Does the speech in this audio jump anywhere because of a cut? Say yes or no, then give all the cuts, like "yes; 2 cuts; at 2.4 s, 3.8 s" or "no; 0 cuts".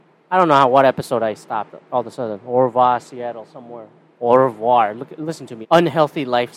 yes; 1 cut; at 5.6 s